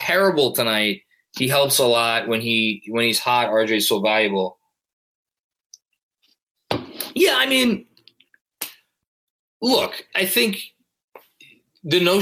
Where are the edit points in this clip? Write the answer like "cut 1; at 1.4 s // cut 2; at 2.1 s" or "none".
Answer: cut 1; at 10.1 s